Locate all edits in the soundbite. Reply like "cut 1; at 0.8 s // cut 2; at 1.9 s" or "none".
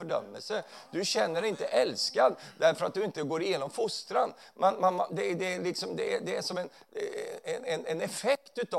none